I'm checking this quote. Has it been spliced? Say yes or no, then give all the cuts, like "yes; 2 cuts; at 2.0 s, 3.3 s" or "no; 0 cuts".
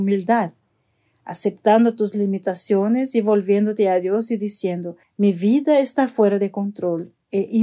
yes; 1 cut; at 5.0 s